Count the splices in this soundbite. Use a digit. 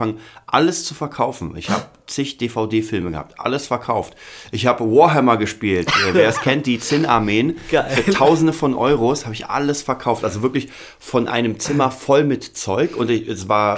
0